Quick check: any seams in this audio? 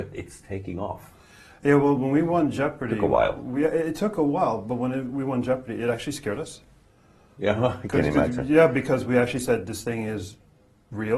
no; 0 cuts

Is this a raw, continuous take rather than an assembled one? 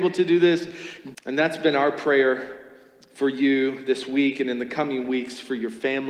no; 1 cut; at 1.1 s

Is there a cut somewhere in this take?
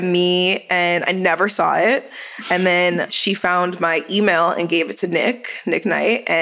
no; 0 cuts

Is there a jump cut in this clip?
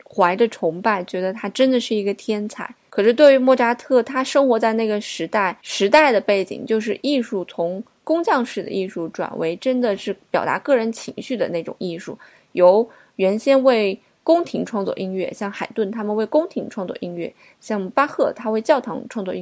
no; 0 cuts

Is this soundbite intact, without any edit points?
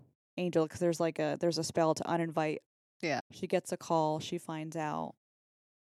no; 1 cut; at 3.2 s

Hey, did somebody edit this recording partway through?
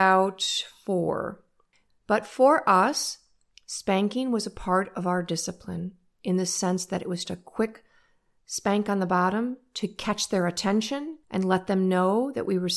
yes; 3 cuts; at 1.9 s, 7.2 s, 11.2 s

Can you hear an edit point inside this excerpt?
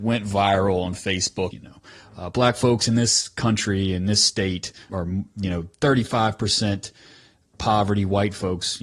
yes; 2 cuts; at 1.5 s, 4.9 s

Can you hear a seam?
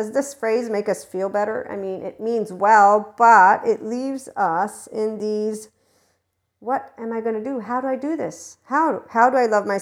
no; 0 cuts

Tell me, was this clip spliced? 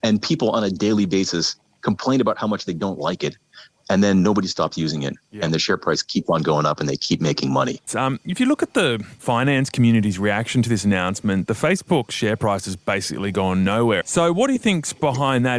yes; 2 cuts; at 7.9 s, 14.0 s

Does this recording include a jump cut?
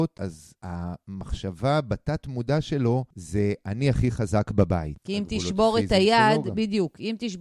yes; 1 cut; at 5.0 s

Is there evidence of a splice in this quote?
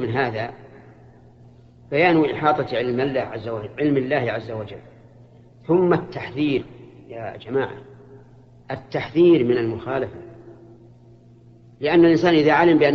no; 0 cuts

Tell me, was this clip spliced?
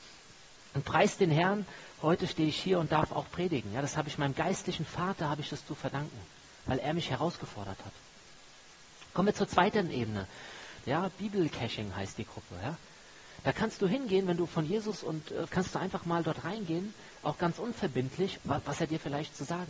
yes; 3 cuts; at 10.8 s, 15.5 s, 18.3 s

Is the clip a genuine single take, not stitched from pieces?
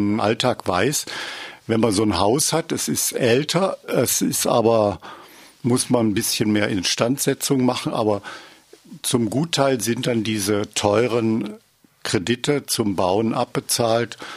yes; 0 cuts

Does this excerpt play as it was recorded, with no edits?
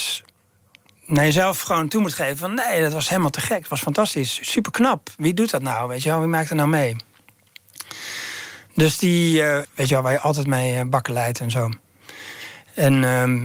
no; 1 cut; at 9.6 s

